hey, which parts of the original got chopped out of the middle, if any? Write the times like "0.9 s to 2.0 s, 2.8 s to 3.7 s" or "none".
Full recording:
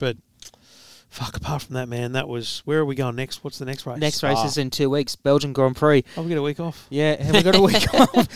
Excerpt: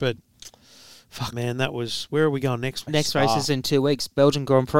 1.3 s to 1.9 s, 3.4 s to 3.9 s